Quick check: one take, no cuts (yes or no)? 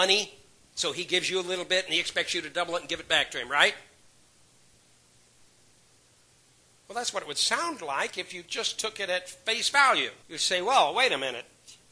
no